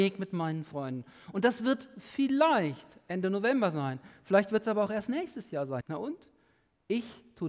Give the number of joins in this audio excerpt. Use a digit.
1